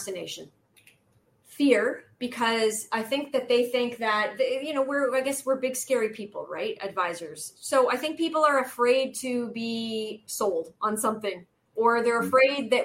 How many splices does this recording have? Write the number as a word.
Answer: one